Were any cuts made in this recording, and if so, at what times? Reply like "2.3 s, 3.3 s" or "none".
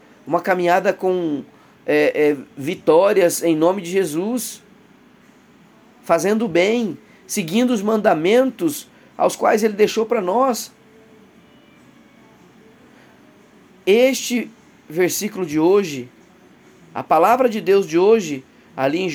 none